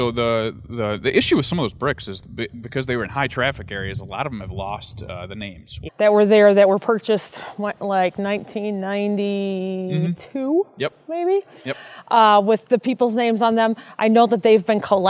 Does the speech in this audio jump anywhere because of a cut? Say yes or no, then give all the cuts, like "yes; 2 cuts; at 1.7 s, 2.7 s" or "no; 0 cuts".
yes; 1 cut; at 5.9 s